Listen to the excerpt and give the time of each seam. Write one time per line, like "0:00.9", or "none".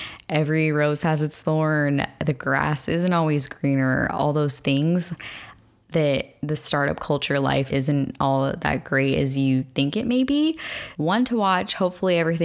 0:07.7
0:10.9